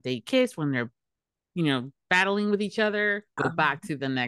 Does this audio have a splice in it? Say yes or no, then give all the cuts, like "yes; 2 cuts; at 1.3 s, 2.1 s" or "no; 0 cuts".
yes; 1 cut; at 3.4 s